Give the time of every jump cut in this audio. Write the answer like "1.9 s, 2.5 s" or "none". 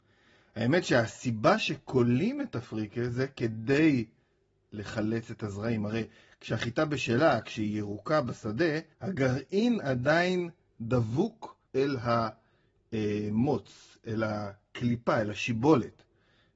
8.9 s, 11.7 s